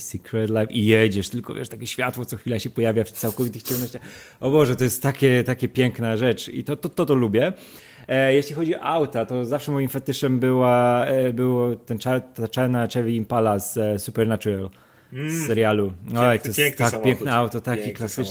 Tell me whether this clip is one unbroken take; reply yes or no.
yes